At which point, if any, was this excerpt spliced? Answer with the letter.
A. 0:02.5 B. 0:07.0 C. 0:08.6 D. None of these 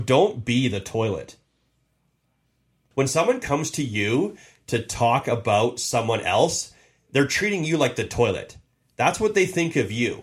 D